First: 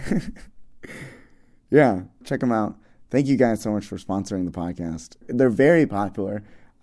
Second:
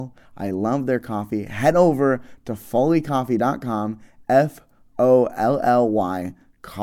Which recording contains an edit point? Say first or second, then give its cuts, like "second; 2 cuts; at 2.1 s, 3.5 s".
first; 2 cuts; at 2.2 s, 5.2 s